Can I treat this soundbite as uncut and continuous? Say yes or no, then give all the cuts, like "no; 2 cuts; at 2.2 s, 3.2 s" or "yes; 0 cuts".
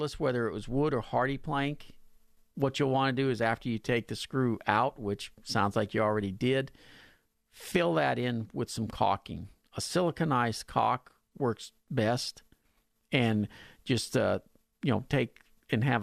yes; 0 cuts